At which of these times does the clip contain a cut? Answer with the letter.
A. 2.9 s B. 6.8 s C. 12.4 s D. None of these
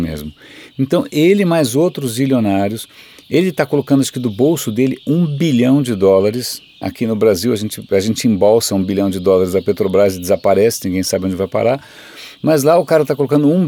B